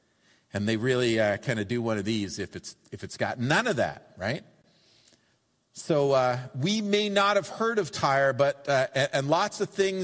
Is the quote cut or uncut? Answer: uncut